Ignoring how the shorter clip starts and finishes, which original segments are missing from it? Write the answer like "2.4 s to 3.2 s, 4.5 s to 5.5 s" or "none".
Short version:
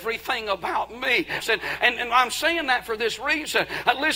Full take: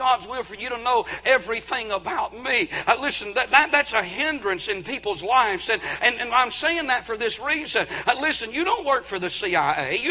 2.8 s to 5.6 s